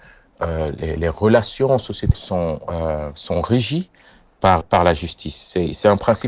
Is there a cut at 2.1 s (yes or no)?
yes